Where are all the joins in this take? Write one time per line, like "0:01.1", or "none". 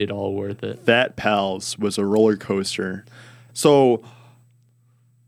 0:03.5